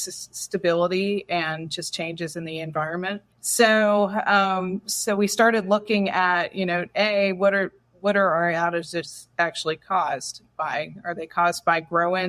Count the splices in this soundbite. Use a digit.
1